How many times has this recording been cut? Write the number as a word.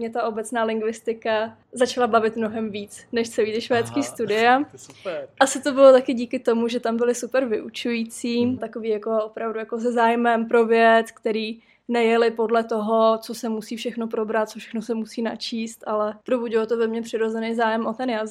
one